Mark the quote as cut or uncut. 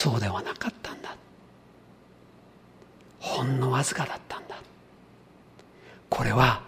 uncut